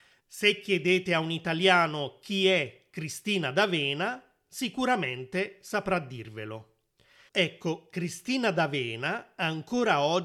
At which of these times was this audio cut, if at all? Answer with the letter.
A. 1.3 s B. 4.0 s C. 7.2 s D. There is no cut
D